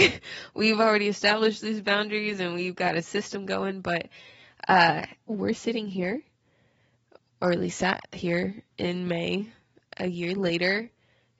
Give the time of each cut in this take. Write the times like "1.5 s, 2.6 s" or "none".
5.3 s